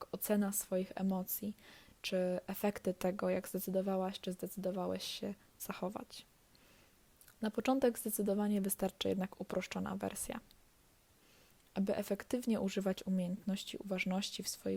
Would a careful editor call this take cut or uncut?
uncut